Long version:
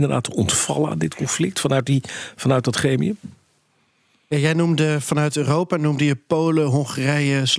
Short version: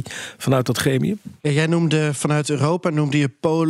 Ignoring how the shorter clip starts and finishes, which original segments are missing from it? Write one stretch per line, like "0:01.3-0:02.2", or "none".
0:03.4-0:04.2

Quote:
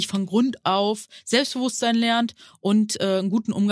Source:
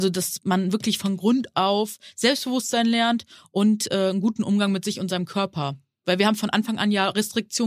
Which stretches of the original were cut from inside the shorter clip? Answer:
none

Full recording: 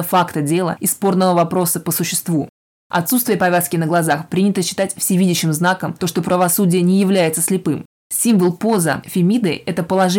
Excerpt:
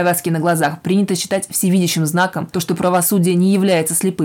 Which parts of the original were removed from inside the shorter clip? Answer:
none

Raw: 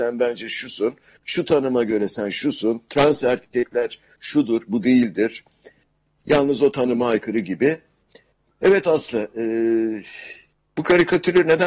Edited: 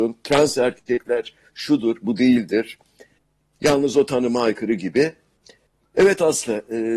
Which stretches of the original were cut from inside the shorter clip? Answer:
none

